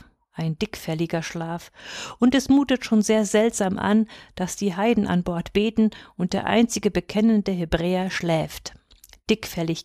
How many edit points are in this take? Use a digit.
0